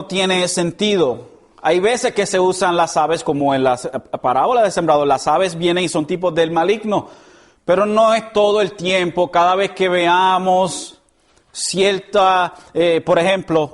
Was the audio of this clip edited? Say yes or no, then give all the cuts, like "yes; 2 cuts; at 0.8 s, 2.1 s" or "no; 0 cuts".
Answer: no; 0 cuts